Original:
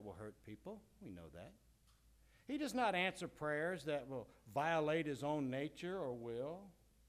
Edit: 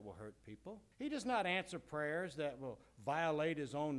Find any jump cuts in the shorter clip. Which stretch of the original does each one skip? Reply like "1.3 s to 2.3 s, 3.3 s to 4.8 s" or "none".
0.9 s to 2.4 s